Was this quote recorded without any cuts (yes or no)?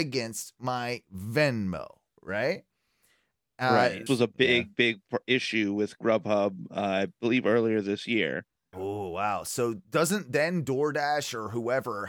no